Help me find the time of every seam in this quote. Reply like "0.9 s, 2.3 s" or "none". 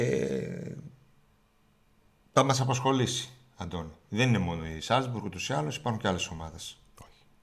none